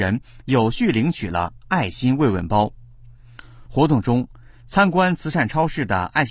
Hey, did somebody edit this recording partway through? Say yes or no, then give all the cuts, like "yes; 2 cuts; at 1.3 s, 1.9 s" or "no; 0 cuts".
no; 0 cuts